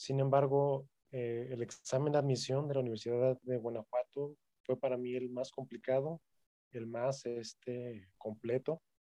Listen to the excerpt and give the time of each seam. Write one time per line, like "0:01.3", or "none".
none